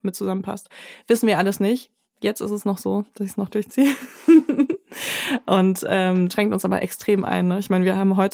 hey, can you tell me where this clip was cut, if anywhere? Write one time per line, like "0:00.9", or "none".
0:06.3